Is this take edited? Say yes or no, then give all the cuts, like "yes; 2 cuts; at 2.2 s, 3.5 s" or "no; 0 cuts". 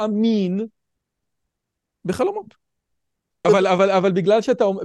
yes; 1 cut; at 3.4 s